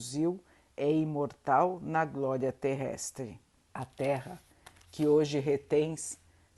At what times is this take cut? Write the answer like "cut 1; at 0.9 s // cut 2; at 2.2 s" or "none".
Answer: cut 1; at 3.7 s